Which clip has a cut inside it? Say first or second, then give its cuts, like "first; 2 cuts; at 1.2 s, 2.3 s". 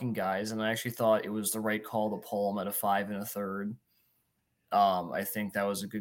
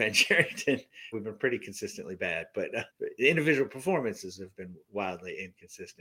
second; 2 cuts; at 1.1 s, 2.9 s